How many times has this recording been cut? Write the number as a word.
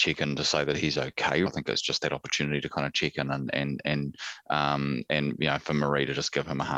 one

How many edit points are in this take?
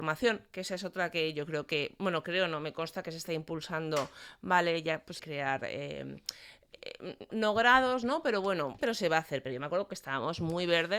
three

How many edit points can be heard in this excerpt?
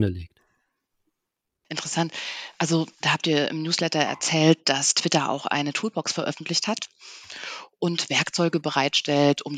two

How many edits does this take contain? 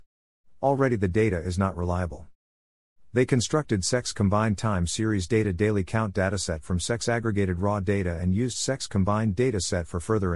zero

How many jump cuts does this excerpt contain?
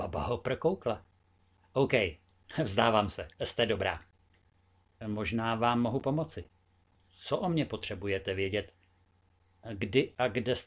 one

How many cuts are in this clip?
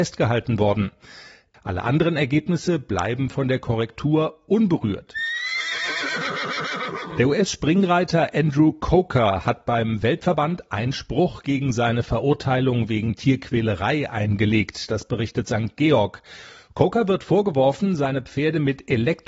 one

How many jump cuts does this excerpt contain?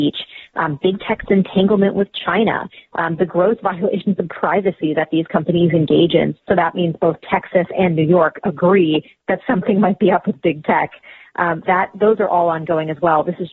two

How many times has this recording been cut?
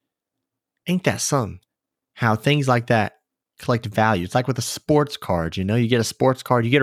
zero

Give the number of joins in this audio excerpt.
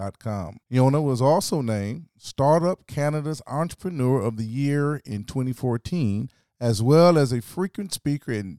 zero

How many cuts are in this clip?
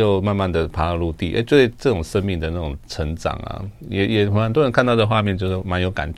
zero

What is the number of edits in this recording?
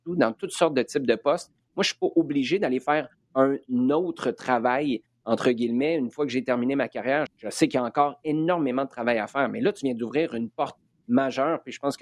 one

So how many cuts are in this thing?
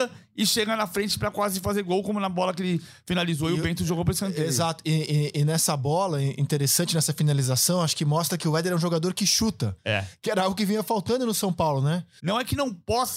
one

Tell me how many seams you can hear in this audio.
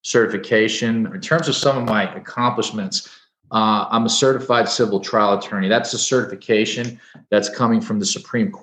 one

